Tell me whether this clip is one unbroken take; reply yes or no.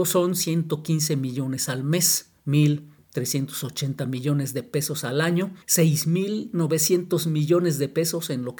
no